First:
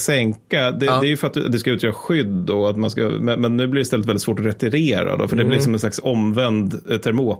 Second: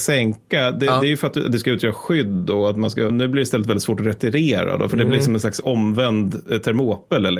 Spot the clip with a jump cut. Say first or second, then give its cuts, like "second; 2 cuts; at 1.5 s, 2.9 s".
second; 1 cut; at 3.1 s